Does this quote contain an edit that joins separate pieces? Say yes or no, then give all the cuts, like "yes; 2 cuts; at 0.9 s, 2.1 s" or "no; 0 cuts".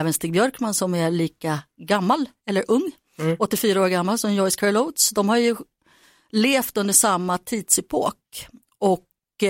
no; 0 cuts